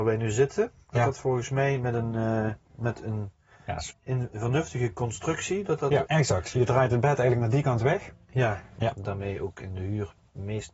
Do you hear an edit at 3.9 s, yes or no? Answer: yes